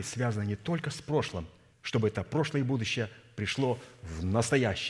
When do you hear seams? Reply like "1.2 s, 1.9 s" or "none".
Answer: 1.7 s